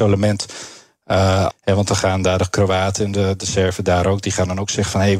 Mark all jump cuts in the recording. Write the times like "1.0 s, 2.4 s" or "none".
1.5 s

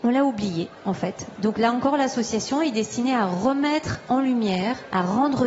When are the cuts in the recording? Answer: 1.3 s

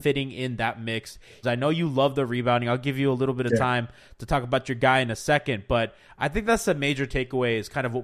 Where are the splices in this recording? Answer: 1.4 s

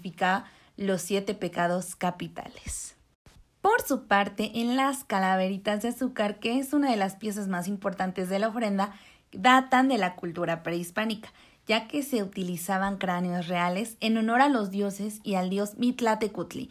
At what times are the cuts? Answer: none

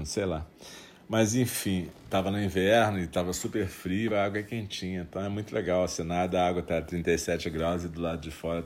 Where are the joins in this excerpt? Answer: 4.1 s

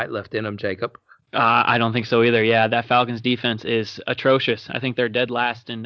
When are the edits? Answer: none

